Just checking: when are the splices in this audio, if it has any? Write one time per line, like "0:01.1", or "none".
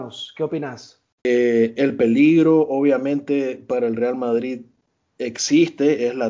0:01.2